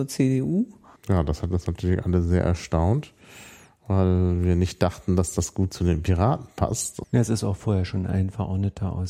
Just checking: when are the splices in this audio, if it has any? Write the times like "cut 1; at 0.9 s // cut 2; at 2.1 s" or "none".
cut 1; at 1.0 s // cut 2; at 7.0 s